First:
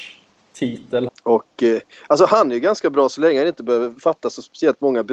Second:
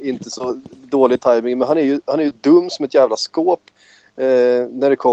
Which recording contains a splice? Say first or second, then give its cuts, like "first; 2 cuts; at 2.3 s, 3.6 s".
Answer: first; 1 cut; at 1.1 s